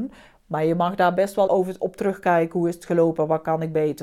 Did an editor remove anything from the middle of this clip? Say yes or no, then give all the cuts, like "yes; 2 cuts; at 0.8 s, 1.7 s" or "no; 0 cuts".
yes; 1 cut; at 1.5 s